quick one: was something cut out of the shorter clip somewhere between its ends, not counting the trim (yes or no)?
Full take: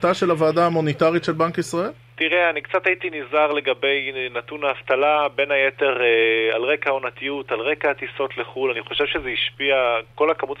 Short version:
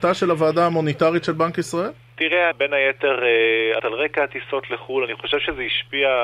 yes